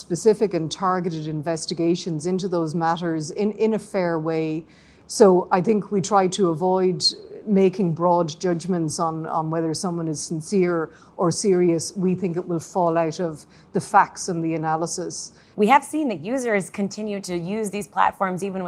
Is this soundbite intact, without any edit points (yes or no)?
no